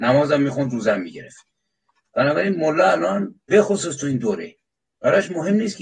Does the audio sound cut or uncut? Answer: cut